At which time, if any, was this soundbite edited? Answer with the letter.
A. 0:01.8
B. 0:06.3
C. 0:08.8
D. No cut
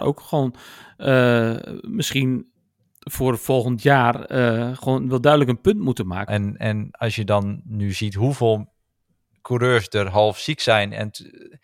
B